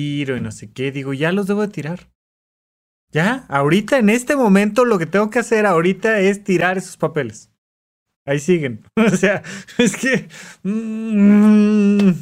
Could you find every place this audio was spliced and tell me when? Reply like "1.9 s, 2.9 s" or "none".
none